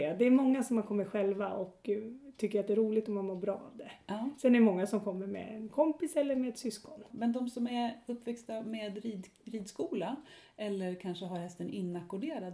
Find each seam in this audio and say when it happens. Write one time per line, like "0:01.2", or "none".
0:07.1